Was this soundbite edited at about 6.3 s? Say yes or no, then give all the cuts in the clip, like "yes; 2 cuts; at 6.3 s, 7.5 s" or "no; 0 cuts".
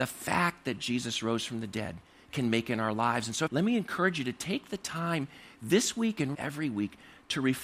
yes; 2 cuts; at 3.5 s, 6.3 s